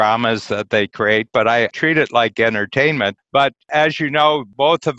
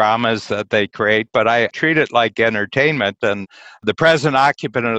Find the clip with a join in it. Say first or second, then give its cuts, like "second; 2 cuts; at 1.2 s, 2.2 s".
first; 1 cut; at 3.2 s